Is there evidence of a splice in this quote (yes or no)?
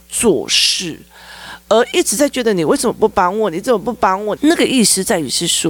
yes